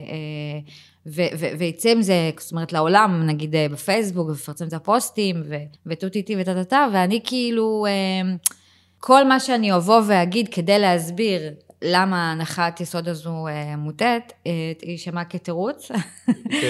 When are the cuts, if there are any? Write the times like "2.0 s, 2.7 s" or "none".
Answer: 5.8 s